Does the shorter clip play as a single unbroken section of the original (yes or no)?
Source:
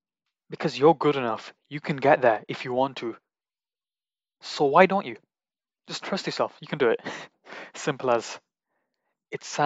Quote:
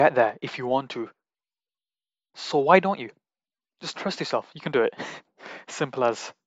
yes